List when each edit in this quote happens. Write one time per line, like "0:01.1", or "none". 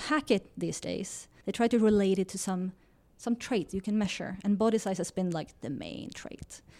0:01.4